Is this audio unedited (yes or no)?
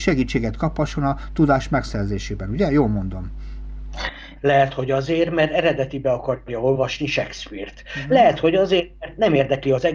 no